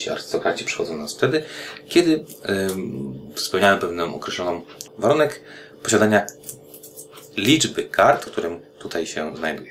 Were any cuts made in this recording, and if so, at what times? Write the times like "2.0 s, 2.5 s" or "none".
4.9 s, 8.3 s